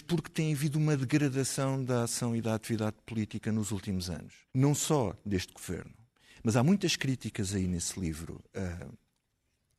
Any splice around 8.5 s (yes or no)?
no